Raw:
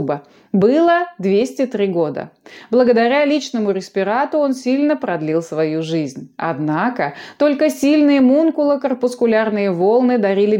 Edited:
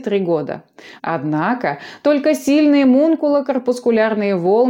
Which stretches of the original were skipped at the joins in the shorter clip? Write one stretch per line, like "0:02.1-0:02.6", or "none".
0:02.7-0:06.3